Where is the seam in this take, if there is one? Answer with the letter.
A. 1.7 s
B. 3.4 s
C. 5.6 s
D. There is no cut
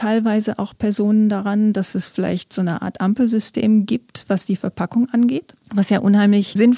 C